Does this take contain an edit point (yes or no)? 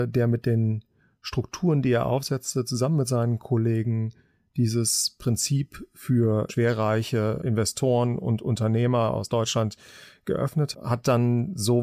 yes